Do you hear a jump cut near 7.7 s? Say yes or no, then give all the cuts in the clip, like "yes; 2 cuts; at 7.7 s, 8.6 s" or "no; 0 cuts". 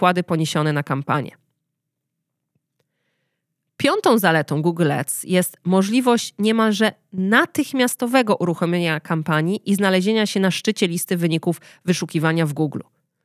no; 0 cuts